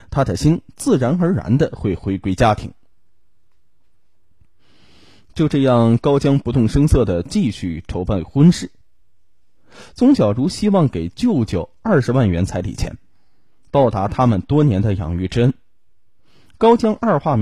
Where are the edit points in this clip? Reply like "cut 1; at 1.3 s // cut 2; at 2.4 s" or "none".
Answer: none

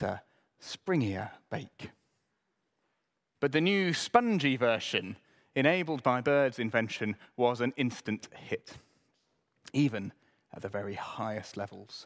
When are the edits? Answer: cut 1; at 3.3 s

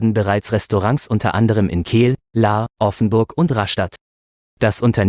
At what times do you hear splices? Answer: none

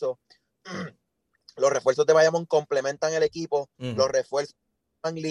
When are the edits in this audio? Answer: none

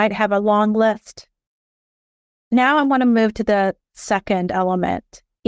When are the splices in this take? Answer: cut 1; at 2.4 s

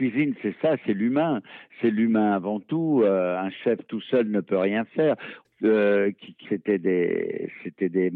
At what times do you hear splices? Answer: cut 1; at 5.4 s // cut 2; at 6.4 s

